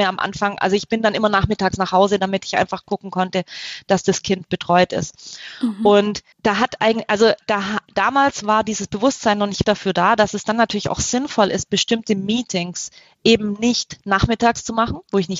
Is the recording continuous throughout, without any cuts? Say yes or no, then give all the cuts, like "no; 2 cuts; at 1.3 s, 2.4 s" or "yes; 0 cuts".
no; 2 cuts; at 6.3 s, 9.6 s